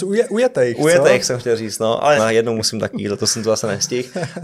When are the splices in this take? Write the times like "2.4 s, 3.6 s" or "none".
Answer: 2.2 s